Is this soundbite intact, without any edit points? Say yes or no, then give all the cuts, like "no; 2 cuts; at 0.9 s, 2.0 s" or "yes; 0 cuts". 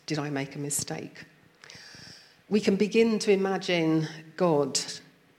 yes; 0 cuts